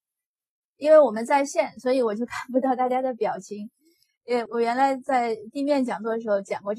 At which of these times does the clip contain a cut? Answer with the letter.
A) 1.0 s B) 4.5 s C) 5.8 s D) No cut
B